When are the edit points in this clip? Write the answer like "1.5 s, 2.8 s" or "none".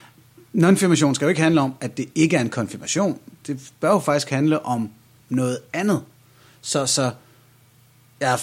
none